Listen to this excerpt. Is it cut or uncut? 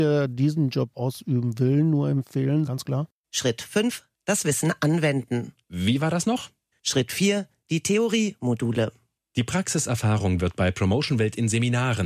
cut